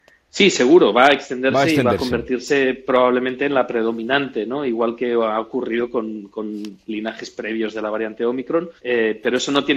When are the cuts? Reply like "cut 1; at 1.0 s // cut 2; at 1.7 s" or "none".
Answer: cut 1; at 8.8 s